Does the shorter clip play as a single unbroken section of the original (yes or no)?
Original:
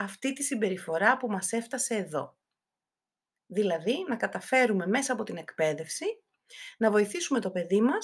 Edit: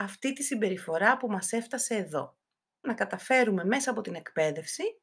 no